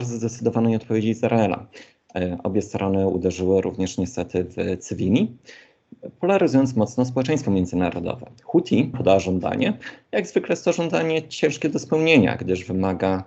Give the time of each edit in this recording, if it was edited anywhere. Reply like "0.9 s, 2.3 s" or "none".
8.9 s